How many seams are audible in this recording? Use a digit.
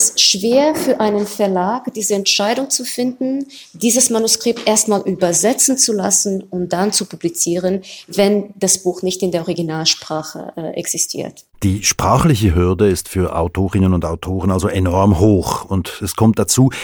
1